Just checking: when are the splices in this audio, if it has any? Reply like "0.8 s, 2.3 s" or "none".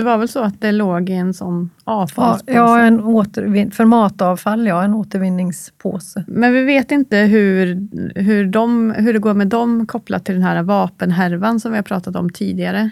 none